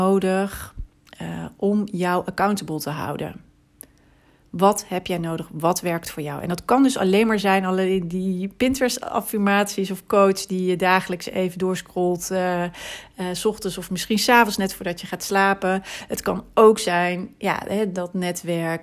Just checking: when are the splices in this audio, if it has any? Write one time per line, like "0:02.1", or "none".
none